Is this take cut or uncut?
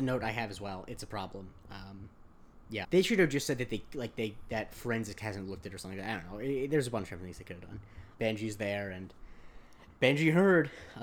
cut